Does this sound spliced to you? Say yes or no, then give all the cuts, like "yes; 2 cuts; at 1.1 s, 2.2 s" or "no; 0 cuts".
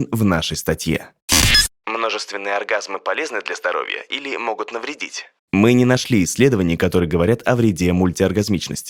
no; 0 cuts